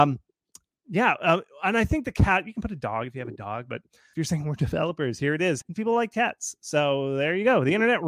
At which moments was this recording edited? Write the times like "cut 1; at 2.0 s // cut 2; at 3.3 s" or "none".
cut 1; at 4.1 s // cut 2; at 5.6 s